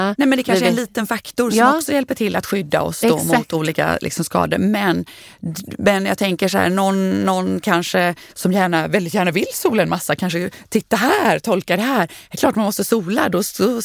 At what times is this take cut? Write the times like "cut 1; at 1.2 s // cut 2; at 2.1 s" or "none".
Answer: cut 1; at 8.3 s